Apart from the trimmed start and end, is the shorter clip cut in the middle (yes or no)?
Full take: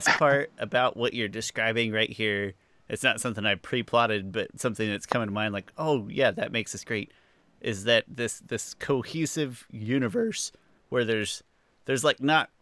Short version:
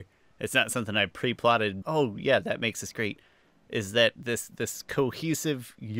yes